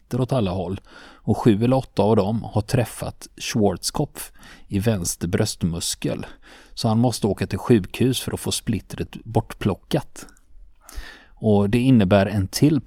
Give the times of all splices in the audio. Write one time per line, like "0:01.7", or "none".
none